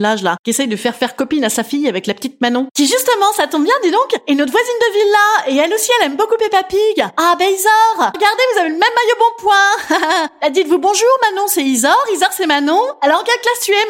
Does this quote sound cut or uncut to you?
cut